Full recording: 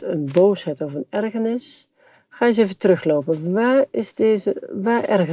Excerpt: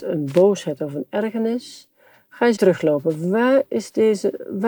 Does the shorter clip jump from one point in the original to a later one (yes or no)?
yes